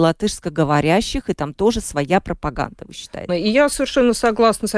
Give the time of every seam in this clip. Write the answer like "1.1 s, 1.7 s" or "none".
3.3 s